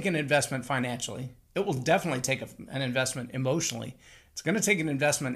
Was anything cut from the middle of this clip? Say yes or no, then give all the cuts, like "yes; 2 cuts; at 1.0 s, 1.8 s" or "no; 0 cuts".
no; 0 cuts